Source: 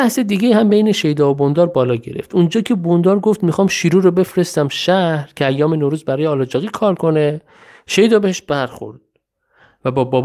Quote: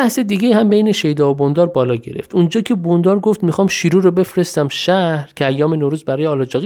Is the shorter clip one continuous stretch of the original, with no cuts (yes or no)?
yes